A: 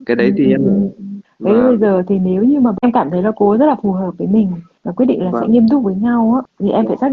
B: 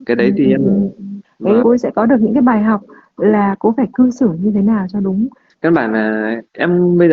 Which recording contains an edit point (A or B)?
B